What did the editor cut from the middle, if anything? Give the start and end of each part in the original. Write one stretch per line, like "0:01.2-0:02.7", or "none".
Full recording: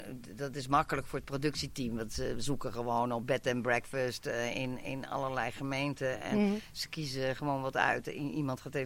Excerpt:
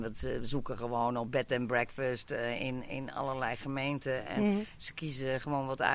none